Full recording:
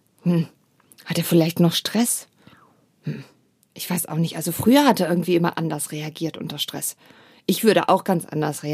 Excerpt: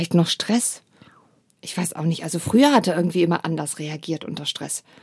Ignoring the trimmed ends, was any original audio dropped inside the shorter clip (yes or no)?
yes